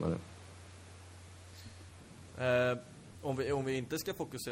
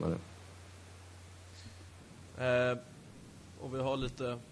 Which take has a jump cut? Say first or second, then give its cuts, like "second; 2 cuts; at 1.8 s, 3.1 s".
first; 1 cut; at 3.1 s